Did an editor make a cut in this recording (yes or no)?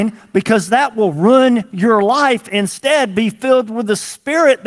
no